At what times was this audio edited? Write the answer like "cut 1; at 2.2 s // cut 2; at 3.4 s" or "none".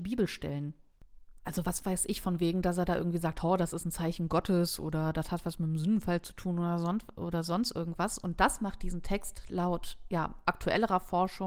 none